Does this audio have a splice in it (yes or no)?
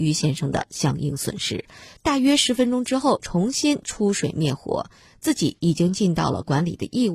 yes